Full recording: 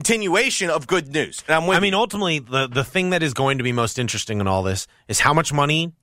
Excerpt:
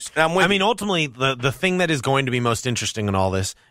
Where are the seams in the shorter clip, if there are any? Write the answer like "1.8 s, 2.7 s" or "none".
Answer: none